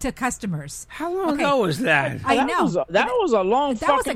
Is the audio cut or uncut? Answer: uncut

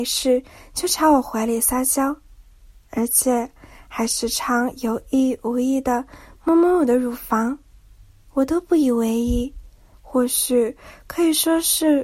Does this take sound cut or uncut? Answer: cut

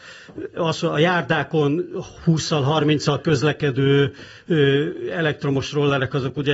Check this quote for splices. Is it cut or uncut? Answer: uncut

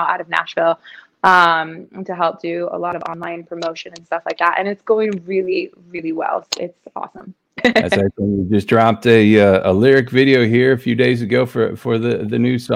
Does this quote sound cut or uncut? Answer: cut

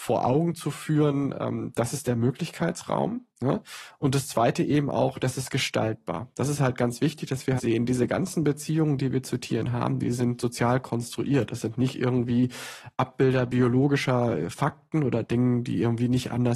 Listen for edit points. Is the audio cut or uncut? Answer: cut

